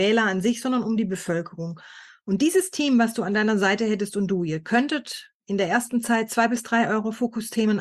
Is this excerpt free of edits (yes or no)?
yes